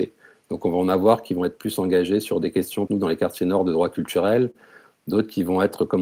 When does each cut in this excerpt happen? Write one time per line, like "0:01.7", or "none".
0:02.9